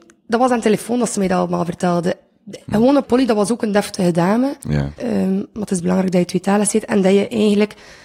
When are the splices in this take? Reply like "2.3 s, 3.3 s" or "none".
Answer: 3.0 s, 5.0 s